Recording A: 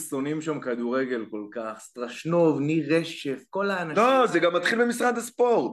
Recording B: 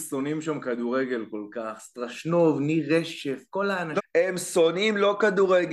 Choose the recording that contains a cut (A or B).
B